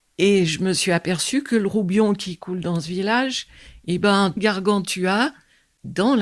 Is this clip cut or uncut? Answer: cut